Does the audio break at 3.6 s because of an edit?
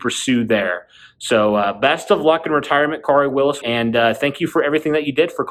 yes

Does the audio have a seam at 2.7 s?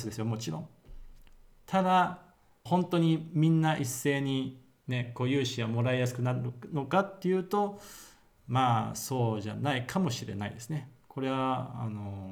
yes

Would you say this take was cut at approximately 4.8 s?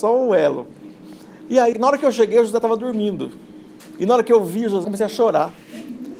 yes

